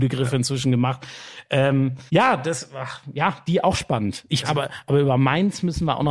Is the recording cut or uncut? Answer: cut